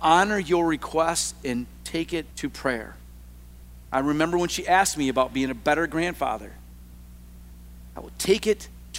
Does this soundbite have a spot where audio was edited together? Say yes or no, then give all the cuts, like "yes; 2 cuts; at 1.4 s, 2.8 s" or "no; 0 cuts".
yes; 1 cut; at 2.3 s